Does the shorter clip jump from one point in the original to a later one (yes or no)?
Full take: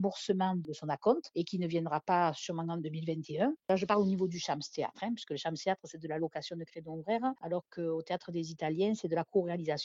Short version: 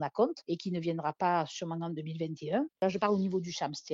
no